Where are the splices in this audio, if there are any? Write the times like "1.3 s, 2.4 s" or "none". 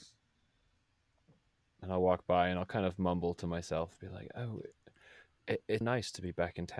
5.8 s